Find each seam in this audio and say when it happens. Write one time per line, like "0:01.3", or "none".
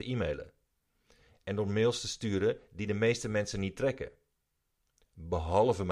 none